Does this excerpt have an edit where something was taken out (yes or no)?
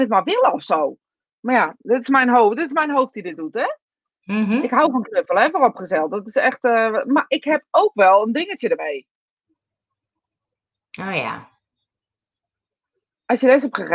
no